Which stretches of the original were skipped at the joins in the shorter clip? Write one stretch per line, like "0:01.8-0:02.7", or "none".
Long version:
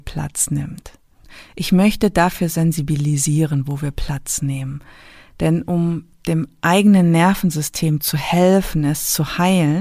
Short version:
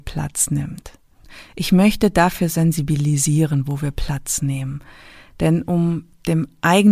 none